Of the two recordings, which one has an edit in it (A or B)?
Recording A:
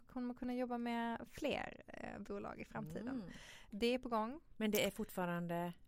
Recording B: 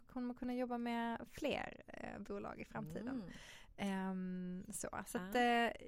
A